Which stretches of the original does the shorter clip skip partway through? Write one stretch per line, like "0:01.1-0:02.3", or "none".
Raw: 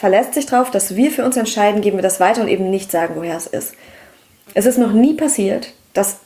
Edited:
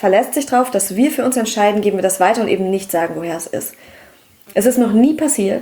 none